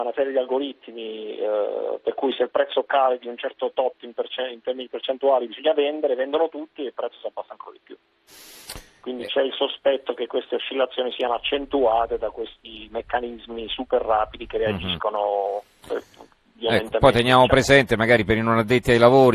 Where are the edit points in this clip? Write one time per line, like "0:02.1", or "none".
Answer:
none